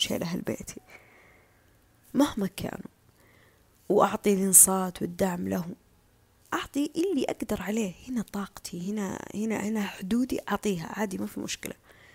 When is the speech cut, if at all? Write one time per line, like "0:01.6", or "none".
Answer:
none